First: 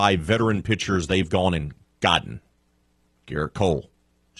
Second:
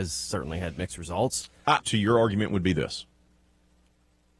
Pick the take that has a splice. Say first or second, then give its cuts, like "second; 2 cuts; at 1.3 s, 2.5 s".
second; 1 cut; at 1.8 s